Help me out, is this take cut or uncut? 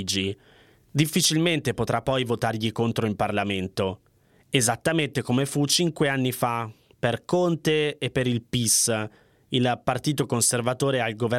uncut